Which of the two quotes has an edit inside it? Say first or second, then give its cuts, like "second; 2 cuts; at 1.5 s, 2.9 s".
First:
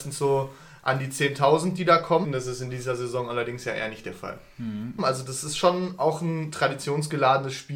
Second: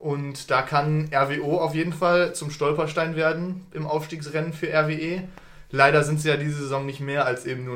first; 2 cuts; at 2.2 s, 5.0 s